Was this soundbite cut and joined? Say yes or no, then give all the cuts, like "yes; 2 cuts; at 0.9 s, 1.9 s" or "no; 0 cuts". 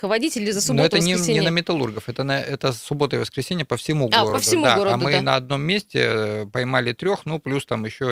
no; 0 cuts